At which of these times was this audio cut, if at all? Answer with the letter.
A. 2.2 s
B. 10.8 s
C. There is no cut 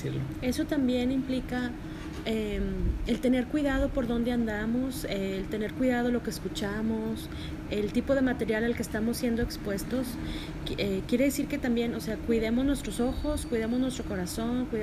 C